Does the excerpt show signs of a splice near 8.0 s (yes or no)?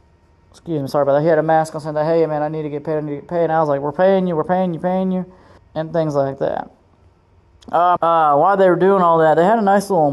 yes